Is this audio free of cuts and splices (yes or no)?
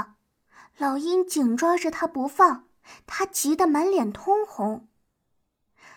yes